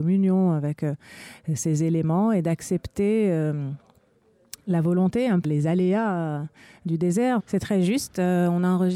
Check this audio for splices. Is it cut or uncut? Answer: cut